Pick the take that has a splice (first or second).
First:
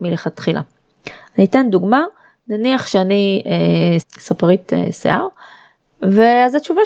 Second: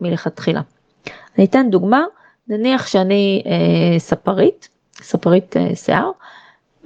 first